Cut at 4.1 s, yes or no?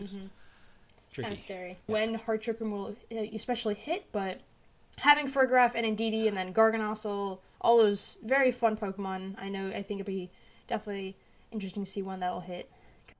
no